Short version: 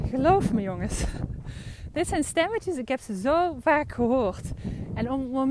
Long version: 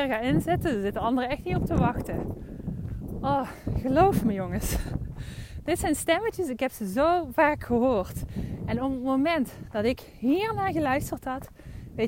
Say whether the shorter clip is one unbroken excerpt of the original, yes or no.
yes